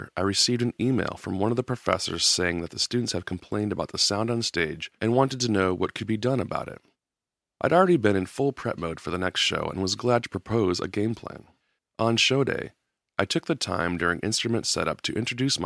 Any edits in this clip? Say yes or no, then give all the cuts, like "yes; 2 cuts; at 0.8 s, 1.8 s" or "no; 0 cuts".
yes; 1 cut; at 11.8 s